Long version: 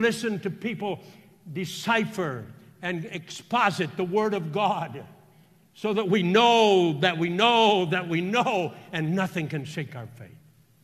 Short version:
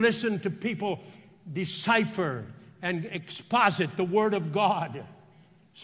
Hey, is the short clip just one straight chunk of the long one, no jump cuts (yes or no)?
yes